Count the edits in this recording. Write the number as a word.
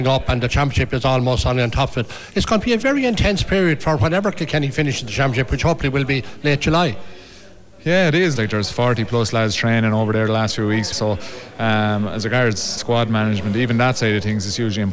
three